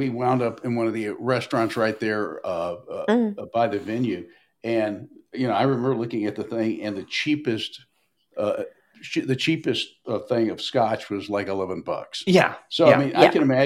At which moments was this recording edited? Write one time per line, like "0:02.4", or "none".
none